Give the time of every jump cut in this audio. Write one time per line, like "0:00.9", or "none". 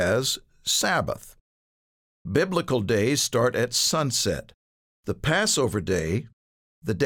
0:02.3